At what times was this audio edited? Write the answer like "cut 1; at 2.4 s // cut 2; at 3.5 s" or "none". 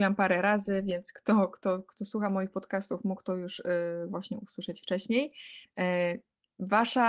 cut 1; at 5.7 s